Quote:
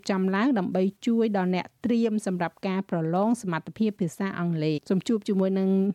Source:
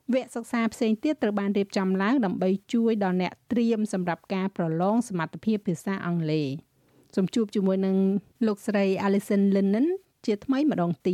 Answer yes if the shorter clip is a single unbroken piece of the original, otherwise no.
no